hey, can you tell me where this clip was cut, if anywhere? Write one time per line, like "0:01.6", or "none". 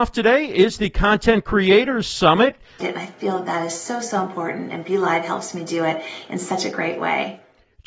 0:02.8